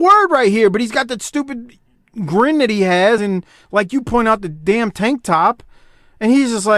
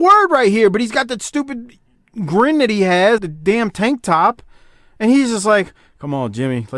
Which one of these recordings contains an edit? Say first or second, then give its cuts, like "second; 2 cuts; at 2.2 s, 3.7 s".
second; 1 cut; at 3.2 s